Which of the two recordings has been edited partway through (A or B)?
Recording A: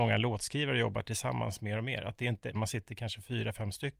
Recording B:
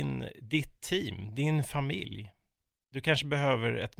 A